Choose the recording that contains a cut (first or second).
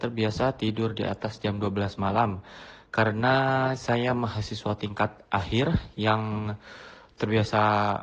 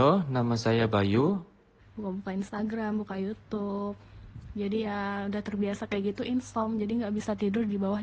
second